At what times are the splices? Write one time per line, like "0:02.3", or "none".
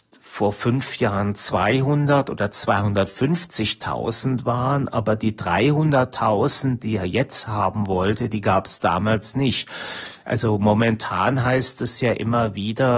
none

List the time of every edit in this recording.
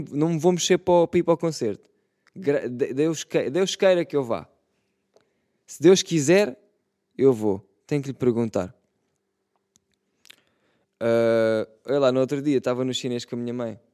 none

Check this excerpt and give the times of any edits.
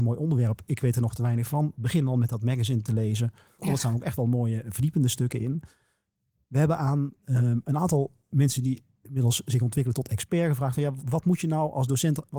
0:03.6
0:11.0

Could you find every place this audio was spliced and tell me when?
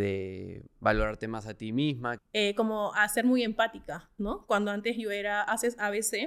0:02.2

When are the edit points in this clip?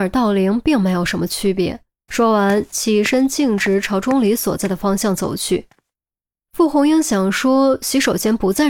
0:02.1

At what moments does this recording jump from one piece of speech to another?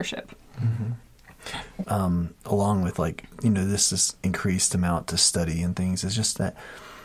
0:01.8

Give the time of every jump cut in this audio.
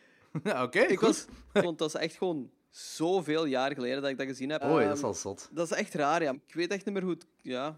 0:01.6
0:04.6
0:06.3

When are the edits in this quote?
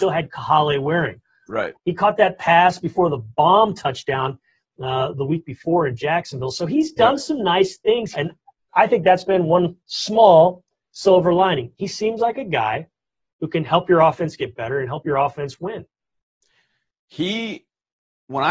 0:01.7
0:08.1

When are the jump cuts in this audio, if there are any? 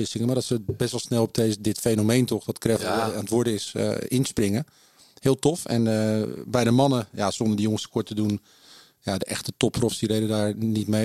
none

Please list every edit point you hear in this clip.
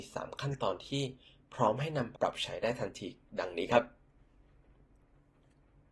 0:02.1

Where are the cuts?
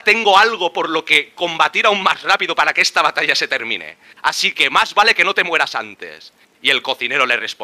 none

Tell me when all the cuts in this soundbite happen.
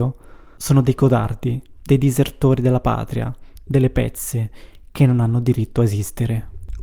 none

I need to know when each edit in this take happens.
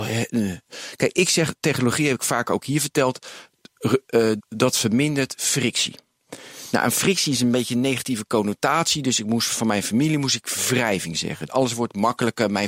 0:04.4
0:11.5

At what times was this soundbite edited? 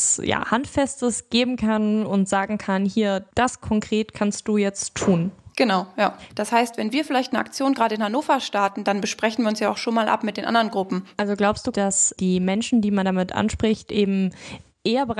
0:06.3
0:11.1

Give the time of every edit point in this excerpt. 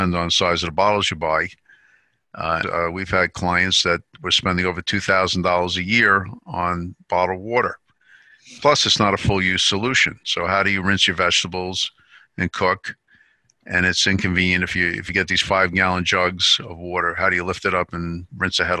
0:02.6

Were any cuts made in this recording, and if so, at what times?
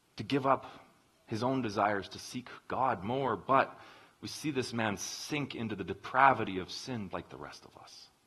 0:07.1

